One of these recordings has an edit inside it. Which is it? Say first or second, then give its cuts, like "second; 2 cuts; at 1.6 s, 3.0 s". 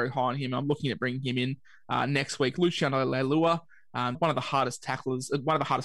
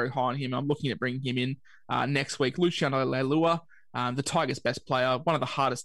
first; 1 cut; at 4.1 s